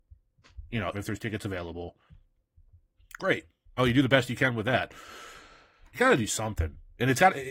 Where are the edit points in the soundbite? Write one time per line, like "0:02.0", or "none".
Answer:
0:00.9
0:03.8
0:05.8